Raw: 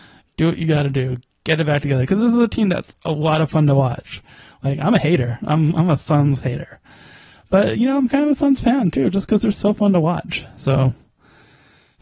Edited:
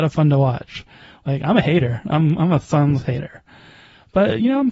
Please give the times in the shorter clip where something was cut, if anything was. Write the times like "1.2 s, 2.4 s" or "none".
none